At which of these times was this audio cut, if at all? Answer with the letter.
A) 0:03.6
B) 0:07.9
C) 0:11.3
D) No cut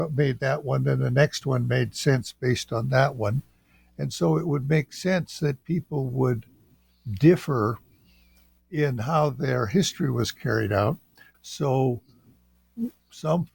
C